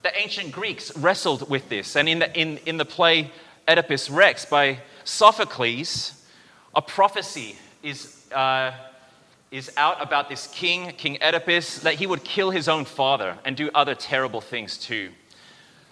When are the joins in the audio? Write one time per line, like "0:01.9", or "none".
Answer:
none